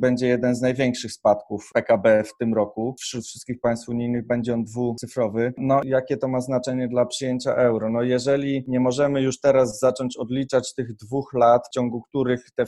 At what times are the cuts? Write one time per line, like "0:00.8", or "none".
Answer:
none